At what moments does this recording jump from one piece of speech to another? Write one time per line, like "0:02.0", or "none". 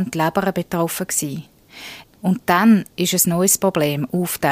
0:02.0